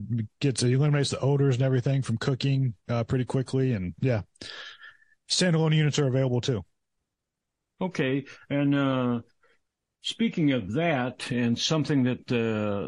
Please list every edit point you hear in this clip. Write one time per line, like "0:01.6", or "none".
0:04.0